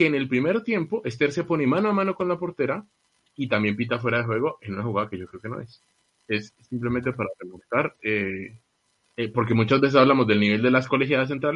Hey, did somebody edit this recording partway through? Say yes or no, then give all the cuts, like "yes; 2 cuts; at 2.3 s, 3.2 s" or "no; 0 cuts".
no; 0 cuts